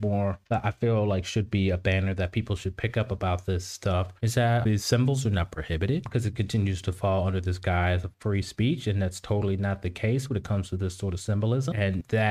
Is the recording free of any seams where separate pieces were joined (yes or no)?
yes